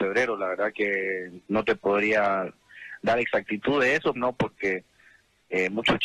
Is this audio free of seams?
no; 2 cuts; at 1.4 s, 4.2 s

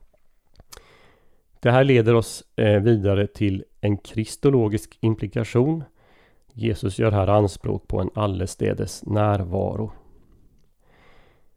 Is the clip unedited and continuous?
yes; 0 cuts

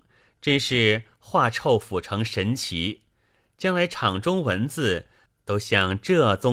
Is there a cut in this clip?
no; 0 cuts

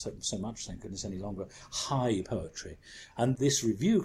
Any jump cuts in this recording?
yes; 1 cut; at 3.1 s

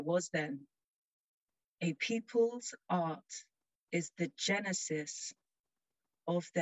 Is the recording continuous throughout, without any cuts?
yes; 0 cuts

